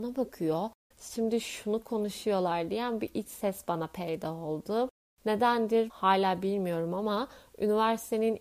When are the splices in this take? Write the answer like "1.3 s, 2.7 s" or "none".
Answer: 0.9 s, 5.1 s